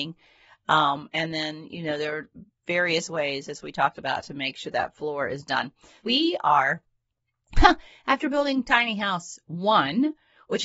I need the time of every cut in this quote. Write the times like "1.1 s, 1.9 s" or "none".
6.0 s